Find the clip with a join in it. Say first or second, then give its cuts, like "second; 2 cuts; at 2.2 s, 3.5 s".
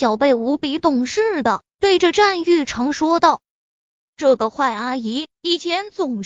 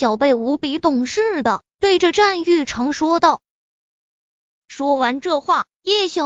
first; 1 cut; at 4.1 s